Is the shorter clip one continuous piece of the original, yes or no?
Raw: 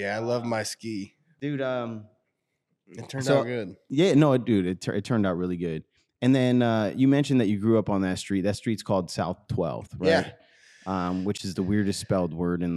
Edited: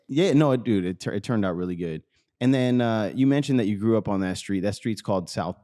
yes